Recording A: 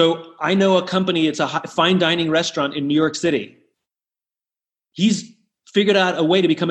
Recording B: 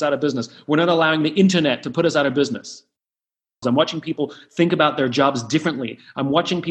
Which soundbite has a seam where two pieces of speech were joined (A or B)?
B